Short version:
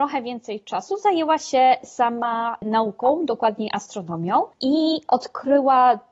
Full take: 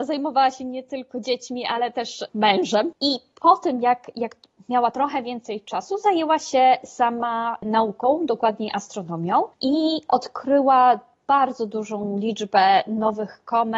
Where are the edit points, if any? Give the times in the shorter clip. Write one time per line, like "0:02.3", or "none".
none

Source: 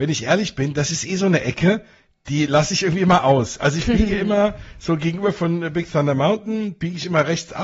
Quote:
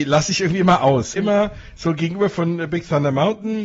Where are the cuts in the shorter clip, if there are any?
0:01.2

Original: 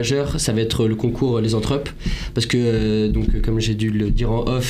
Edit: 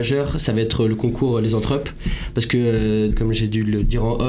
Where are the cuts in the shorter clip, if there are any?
0:03.1

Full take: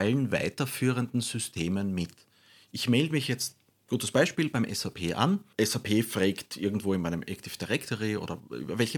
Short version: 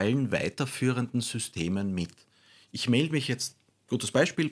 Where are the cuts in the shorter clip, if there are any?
none

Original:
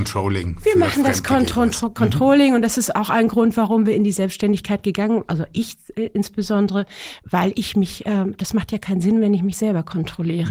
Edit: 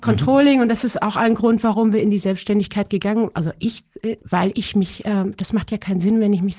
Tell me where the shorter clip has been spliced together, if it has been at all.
0:04.2

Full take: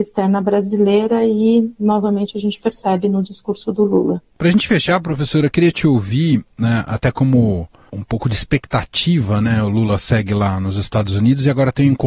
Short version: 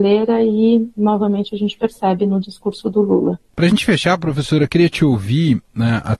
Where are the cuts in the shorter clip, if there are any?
none

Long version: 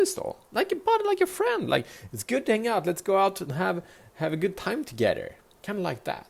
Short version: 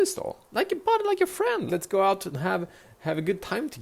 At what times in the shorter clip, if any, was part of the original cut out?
0:01.7

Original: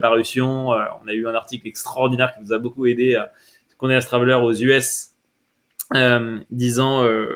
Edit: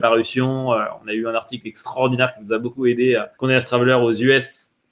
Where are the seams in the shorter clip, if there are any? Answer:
0:03.3

